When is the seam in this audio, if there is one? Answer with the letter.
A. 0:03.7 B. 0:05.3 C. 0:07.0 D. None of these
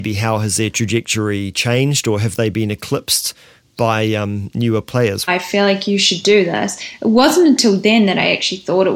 B